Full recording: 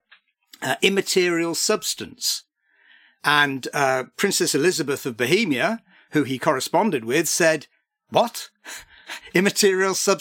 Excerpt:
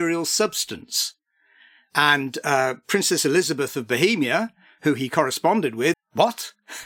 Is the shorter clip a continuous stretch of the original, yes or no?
no